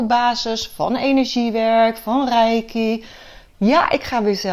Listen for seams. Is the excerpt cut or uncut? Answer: cut